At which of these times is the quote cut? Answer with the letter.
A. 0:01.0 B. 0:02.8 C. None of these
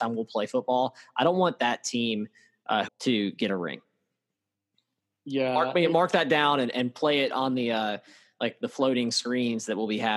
B